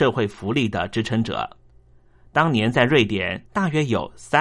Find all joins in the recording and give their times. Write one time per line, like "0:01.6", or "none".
0:03.4